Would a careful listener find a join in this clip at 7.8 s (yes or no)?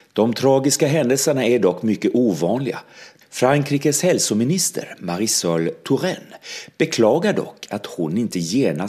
no